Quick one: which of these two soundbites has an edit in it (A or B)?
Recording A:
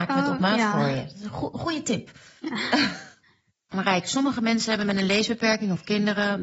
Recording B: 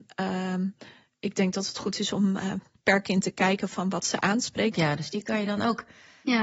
B